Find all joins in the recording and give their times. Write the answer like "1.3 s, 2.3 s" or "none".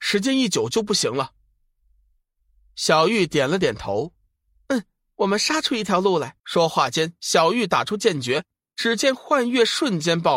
6.4 s